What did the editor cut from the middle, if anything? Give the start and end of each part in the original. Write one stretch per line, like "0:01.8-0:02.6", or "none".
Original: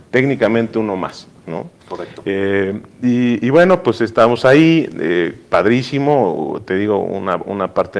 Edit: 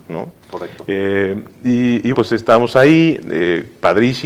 0:03.5-0:03.8